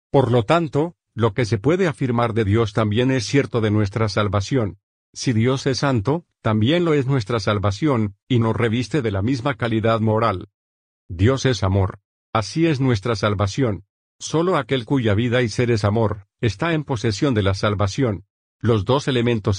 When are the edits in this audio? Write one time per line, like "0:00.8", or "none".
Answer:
0:01.1